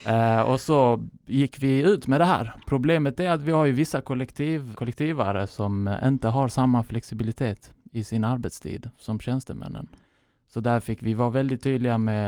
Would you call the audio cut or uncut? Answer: cut